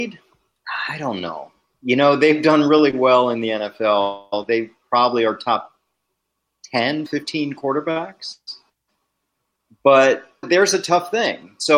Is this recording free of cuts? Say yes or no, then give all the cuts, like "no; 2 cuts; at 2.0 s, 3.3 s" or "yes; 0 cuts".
no; 2 cuts; at 7.1 s, 10.4 s